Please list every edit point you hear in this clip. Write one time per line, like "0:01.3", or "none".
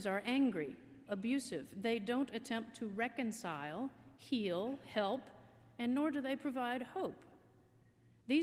0:01.1